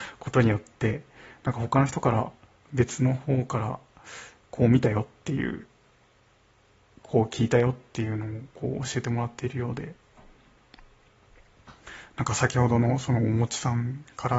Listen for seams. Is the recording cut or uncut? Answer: uncut